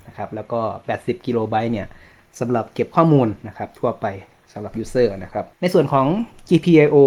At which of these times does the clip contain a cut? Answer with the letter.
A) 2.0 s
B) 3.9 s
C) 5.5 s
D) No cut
C